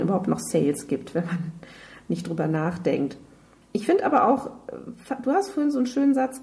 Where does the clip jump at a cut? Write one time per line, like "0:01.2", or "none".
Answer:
0:03.6